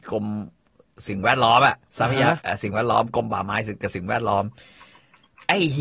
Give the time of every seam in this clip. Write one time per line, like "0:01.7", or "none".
0:01.9